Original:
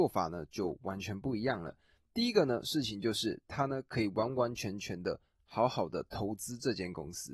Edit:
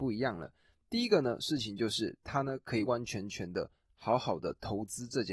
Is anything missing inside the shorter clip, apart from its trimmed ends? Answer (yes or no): yes